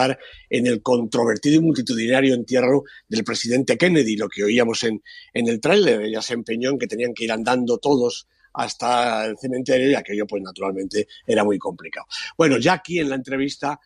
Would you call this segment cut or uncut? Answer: uncut